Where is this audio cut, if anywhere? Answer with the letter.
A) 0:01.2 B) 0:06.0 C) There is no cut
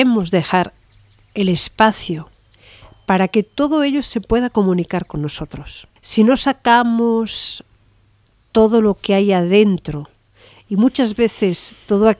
B